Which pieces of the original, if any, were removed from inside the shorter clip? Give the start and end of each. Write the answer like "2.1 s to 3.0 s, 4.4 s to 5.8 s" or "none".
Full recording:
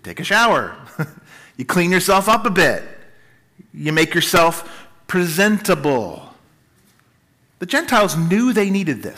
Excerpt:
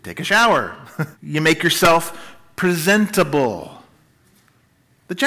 1.1 s to 3.6 s